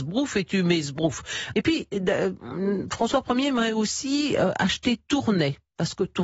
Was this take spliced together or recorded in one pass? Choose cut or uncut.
cut